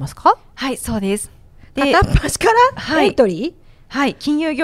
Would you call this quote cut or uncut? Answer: cut